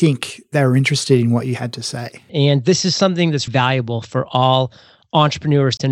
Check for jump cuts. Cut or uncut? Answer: cut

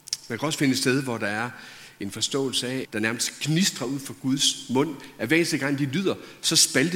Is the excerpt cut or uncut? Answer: cut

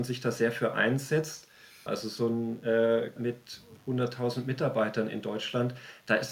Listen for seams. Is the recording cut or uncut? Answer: cut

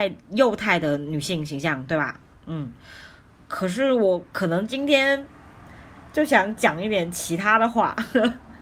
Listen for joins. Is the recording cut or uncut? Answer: uncut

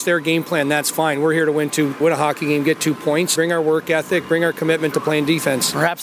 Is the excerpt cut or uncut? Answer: cut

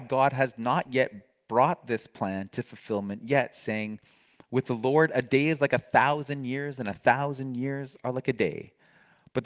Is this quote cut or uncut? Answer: uncut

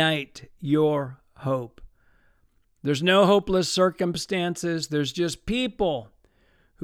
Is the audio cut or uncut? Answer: uncut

